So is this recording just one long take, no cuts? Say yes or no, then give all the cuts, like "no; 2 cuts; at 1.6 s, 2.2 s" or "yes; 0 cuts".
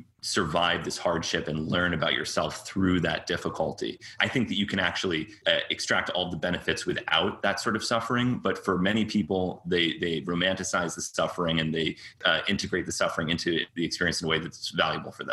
no; 1 cut; at 4.2 s